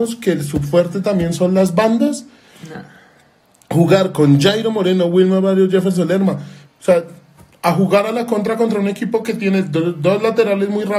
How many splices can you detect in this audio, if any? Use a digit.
1